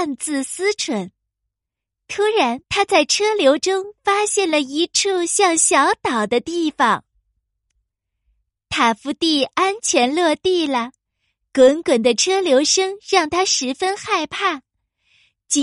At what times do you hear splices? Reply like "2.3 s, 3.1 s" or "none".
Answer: 2.6 s